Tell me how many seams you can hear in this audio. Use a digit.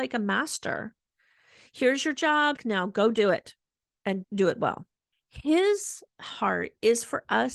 2